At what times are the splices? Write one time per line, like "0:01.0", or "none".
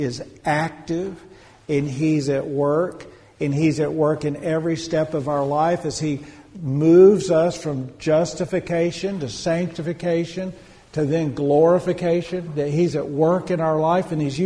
none